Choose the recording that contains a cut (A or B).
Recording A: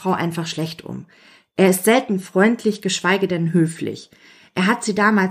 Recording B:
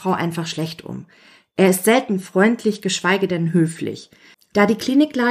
B